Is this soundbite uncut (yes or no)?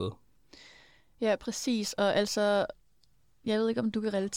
yes